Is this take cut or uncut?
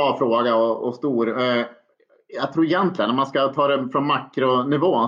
uncut